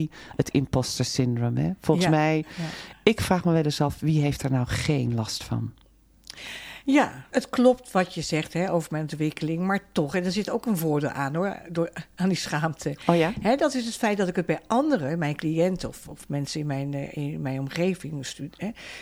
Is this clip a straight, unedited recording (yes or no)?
no